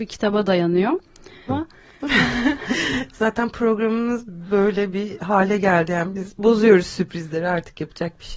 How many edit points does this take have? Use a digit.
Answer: 1